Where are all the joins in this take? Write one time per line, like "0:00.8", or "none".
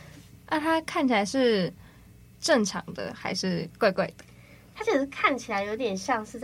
0:02.3